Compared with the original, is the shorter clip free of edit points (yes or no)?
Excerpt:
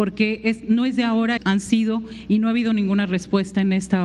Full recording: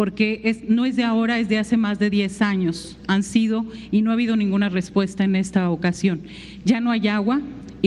no